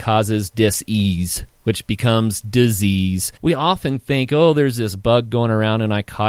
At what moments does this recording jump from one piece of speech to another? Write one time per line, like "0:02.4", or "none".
0:03.4